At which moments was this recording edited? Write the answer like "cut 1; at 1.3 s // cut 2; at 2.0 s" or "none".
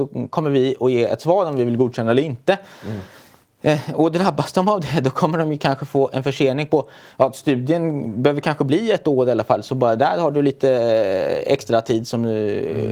none